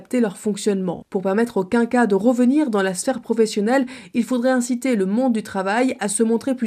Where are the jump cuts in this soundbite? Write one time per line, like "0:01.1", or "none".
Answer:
0:01.0